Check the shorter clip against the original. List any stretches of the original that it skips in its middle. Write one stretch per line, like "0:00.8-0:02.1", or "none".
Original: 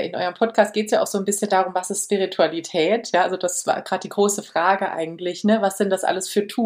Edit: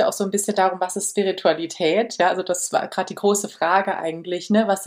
none